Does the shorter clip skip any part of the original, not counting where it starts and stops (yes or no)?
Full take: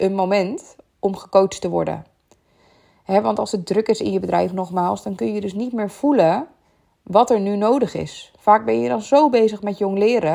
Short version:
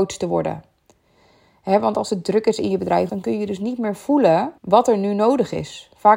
yes